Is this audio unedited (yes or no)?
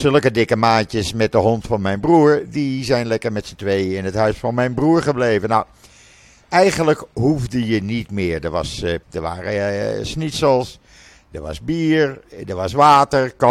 no